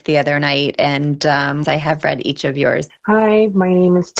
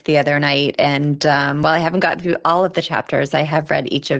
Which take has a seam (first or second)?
first